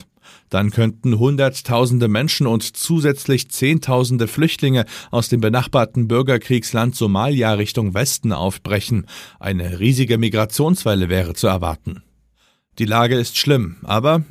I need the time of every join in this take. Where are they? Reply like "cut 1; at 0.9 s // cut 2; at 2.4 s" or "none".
none